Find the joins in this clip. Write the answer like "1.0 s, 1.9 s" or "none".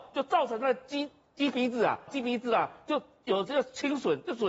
2.1 s